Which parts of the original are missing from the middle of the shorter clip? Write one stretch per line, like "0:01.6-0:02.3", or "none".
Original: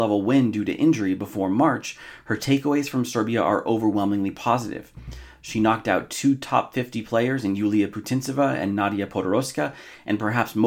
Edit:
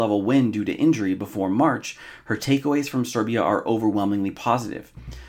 none